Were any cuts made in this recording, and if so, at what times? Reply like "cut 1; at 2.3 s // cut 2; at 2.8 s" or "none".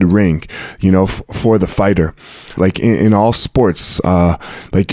cut 1; at 2.6 s